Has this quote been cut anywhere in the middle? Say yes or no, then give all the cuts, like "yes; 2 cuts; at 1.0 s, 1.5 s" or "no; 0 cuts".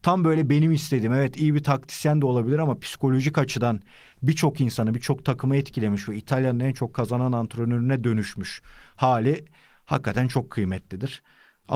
no; 0 cuts